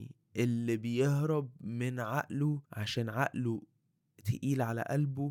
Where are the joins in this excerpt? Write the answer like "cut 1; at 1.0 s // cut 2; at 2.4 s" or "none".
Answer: cut 1; at 2.6 s